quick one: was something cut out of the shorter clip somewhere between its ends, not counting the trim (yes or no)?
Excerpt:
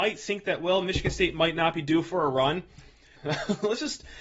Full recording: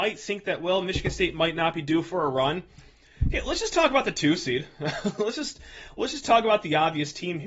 yes